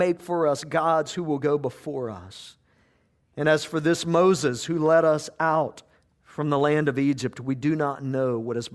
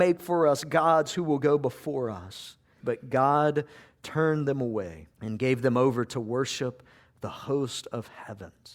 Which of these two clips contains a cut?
second; 2 cuts; at 2.8 s, 5.1 s

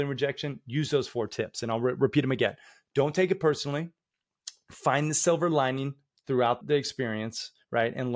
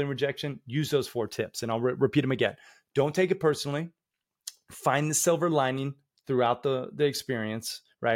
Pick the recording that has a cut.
first; 1 cut; at 6.6 s

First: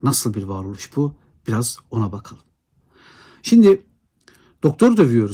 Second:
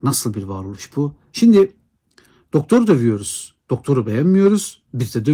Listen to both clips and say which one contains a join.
second; 1 cut; at 1.3 s

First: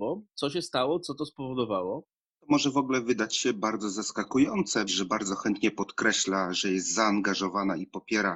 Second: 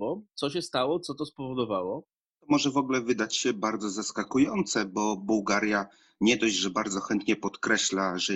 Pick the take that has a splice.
first; 1 cut; at 4.9 s

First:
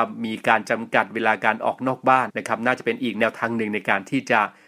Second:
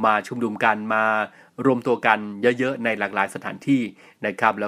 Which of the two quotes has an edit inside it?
first; 1 cut; at 2.3 s

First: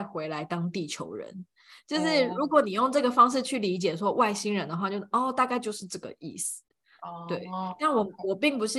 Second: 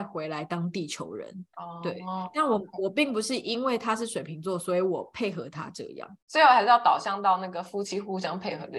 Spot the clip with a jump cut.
second; 1 cut; at 1.5 s

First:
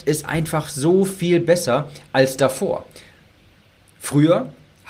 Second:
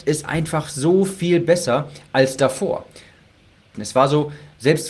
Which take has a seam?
second; 1 cut; at 3.7 s

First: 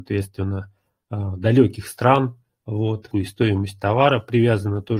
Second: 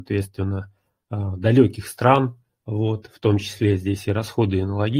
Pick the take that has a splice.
first; 1 cut; at 3.1 s

